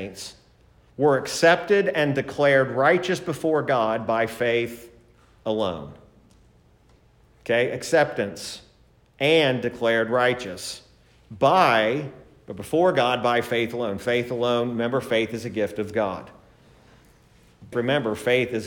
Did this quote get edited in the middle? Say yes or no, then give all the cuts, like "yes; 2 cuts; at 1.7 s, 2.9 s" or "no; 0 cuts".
yes; 1 cut; at 17.7 s